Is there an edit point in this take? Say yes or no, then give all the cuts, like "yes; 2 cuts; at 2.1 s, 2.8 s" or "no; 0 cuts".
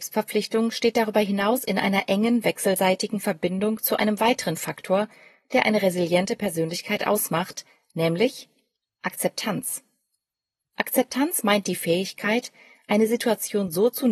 no; 0 cuts